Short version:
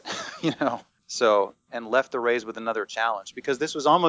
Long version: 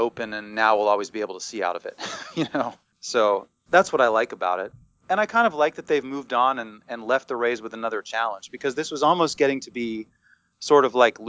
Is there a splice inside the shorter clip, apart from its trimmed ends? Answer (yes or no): yes